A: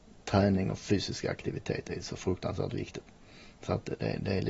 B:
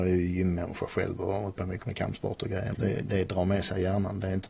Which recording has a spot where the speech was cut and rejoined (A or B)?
B